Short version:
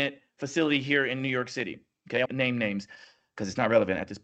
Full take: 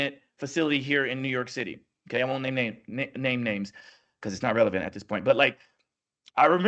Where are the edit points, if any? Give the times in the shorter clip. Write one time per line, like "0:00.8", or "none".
0:02.2